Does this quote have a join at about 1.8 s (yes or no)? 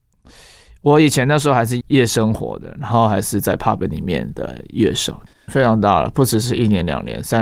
yes